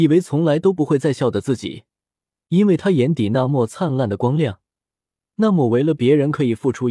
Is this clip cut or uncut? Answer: uncut